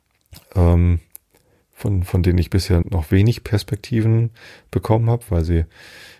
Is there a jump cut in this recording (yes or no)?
yes